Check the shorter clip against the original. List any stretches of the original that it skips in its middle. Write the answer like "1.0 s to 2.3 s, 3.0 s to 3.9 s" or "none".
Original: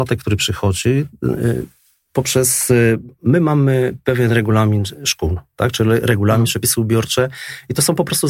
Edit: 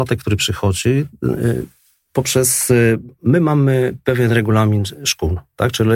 none